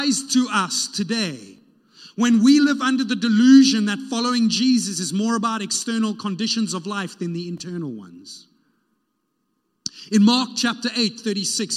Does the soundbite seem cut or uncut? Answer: uncut